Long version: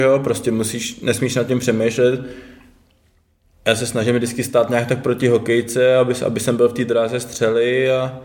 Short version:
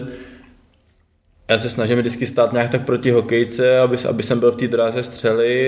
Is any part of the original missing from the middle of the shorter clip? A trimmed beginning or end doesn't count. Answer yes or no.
no